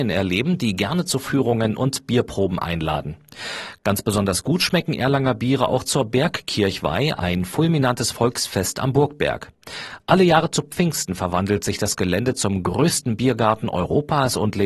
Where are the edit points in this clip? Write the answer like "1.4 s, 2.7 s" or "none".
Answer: none